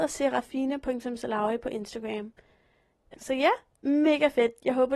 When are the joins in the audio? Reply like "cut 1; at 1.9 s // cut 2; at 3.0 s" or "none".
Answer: cut 1; at 3.1 s